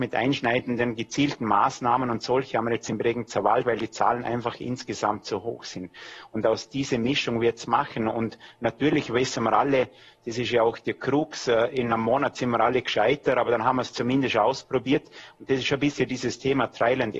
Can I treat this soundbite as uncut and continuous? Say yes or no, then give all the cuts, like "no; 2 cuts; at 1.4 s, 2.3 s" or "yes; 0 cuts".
yes; 0 cuts